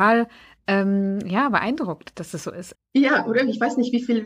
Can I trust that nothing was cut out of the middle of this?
no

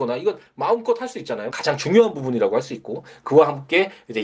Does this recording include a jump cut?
yes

